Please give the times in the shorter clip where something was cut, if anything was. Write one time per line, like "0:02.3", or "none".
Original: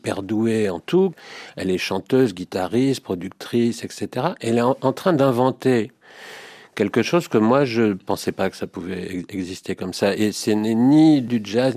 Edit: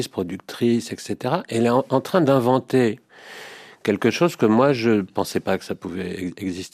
none